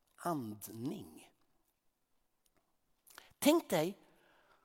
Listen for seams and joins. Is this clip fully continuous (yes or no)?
yes